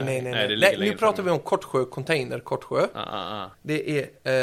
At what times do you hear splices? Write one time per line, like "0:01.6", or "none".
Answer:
0:03.5